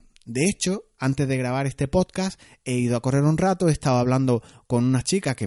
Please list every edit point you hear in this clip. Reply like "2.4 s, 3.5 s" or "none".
none